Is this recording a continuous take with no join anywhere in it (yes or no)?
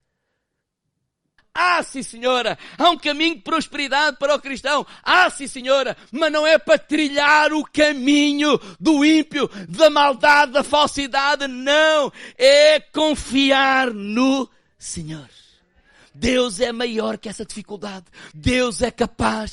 no